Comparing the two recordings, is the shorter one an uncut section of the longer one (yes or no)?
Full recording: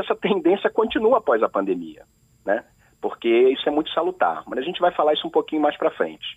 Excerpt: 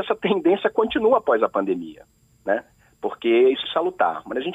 no